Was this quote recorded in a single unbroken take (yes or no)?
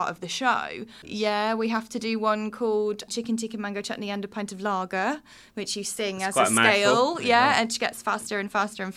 no